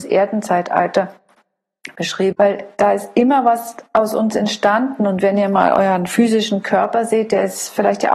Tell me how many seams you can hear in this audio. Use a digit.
1